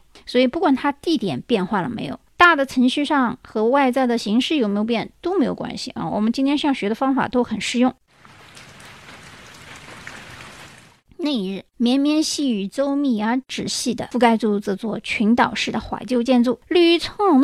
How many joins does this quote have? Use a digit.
0